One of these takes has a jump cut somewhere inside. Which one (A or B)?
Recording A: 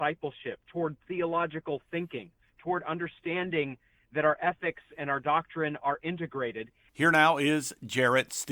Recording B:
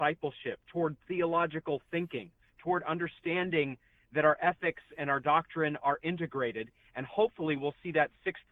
A